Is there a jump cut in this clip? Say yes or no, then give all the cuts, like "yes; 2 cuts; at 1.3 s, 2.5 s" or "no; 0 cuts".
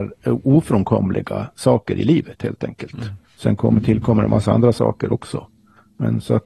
yes; 1 cut; at 3.2 s